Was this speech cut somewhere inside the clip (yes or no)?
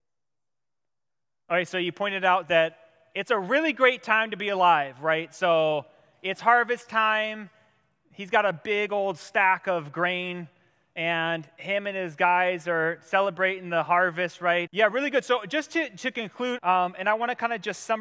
yes